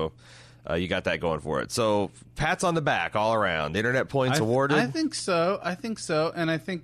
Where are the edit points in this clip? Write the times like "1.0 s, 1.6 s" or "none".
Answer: none